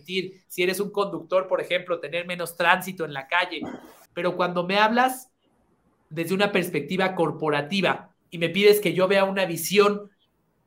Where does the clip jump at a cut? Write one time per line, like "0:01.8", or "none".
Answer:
0:04.1
0:08.2